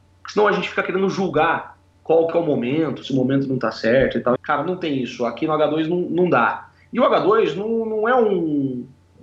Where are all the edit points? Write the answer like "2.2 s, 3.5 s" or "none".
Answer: 3.0 s, 4.4 s

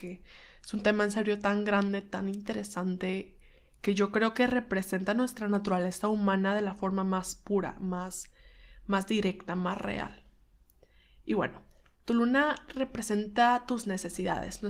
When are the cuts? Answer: none

